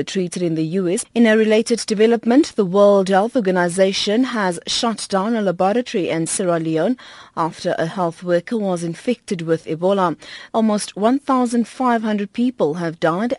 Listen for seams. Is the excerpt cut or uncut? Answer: cut